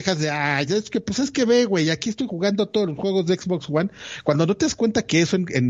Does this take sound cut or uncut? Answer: uncut